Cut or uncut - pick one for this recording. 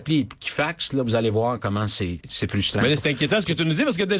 cut